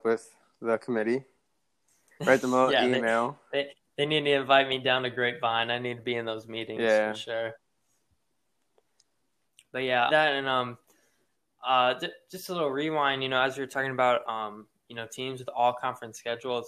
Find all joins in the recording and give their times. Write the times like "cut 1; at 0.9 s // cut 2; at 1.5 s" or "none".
cut 1; at 10.1 s